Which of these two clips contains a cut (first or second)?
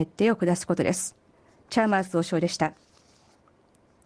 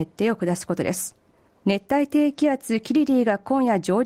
second